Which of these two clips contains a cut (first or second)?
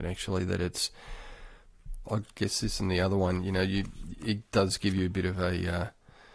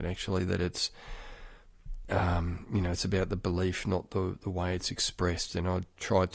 first